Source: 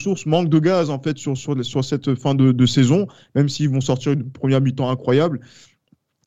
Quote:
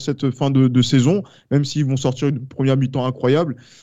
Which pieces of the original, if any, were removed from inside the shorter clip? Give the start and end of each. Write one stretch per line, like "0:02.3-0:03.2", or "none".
none